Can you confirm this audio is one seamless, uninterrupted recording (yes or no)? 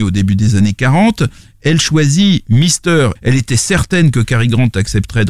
no